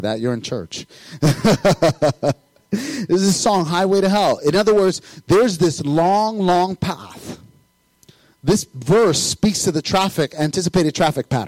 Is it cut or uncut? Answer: uncut